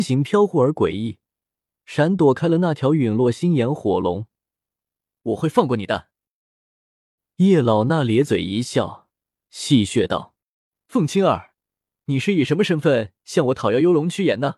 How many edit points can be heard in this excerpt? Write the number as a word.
one